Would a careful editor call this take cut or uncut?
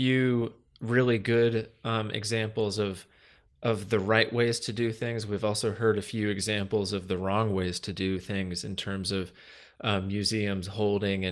uncut